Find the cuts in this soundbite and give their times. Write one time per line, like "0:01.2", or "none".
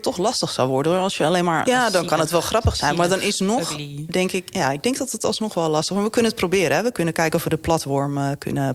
0:01.6

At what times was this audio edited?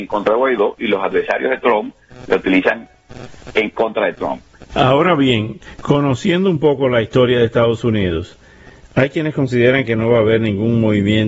0:04.7

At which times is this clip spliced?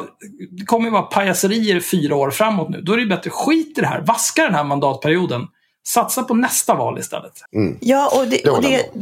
0:07.5

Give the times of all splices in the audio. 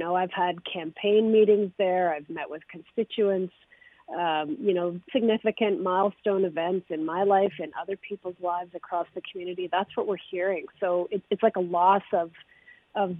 0:05.1

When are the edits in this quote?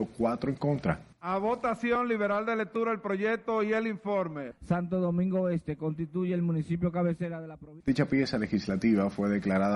0:01.1
0:07.8

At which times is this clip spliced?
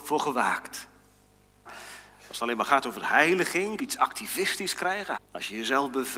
0:01.7
0:03.8
0:05.1

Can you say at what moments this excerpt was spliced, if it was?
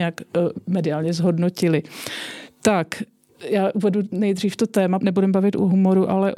0:03.3
0:05.0

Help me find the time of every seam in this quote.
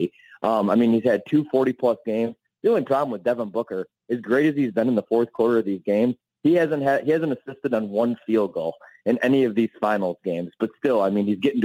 none

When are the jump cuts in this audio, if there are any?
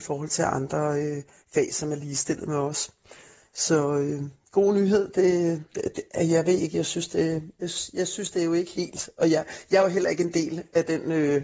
none

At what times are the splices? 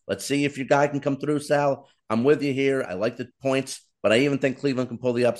none

